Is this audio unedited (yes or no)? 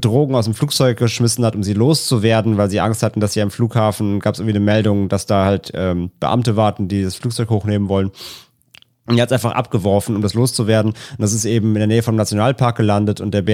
yes